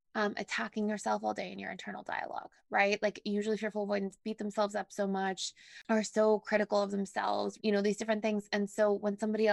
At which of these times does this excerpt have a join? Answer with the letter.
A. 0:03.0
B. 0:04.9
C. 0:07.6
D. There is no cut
C